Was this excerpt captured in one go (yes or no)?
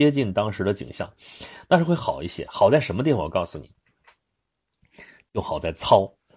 yes